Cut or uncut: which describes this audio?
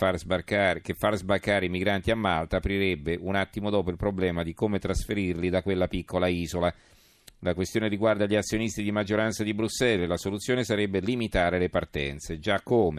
uncut